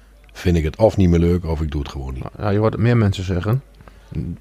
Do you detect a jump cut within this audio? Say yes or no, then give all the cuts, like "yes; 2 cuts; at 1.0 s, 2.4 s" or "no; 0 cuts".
no; 0 cuts